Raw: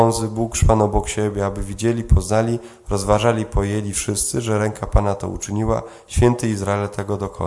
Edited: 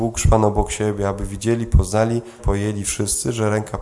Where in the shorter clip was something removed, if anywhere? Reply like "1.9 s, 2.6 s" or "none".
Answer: 2.4 s